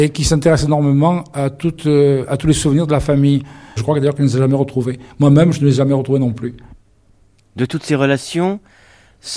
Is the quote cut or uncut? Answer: cut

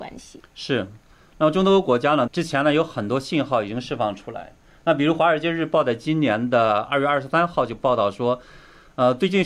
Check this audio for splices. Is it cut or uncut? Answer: cut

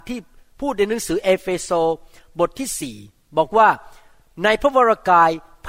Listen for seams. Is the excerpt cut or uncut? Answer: uncut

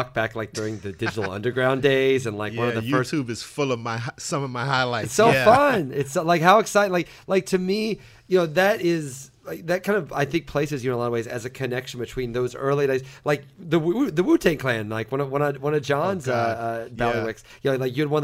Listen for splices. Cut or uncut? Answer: uncut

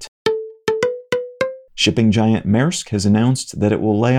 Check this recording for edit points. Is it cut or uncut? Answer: cut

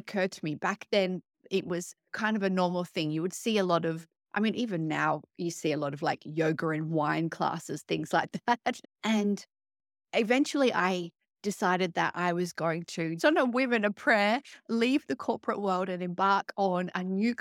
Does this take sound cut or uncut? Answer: cut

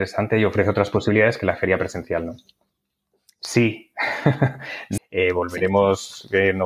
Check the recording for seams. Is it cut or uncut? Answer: cut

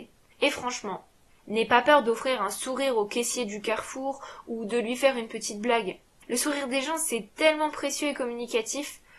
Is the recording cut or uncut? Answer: uncut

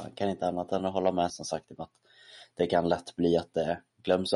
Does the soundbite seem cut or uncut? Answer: cut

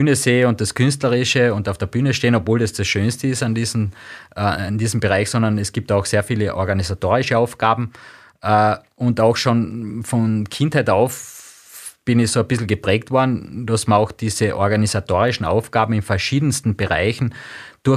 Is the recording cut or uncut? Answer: uncut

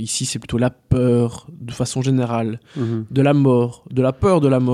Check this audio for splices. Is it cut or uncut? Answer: uncut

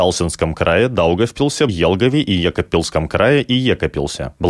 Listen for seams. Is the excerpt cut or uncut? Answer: cut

